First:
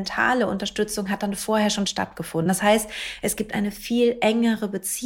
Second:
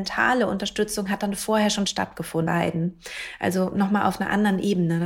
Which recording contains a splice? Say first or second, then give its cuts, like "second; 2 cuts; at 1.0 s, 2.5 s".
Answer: second; 1 cut; at 2.5 s